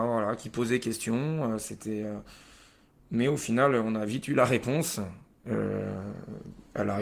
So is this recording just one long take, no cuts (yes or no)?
yes